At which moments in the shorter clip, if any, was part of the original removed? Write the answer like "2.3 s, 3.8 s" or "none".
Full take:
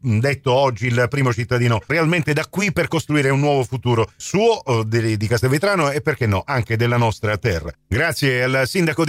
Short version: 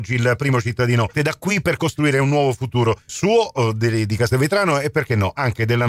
1.1 s